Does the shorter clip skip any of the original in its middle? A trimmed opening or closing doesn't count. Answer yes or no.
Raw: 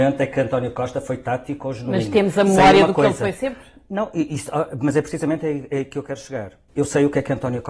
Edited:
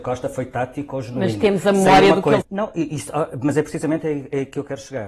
yes